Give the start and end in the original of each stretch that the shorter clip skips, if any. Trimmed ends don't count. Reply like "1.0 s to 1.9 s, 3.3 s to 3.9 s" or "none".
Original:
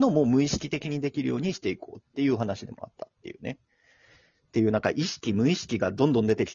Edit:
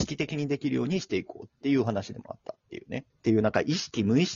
3.6 s to 4.4 s